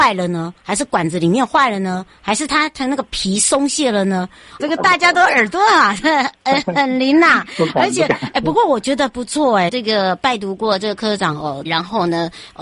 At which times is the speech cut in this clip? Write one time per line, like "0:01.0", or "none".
0:04.6
0:09.7
0:11.6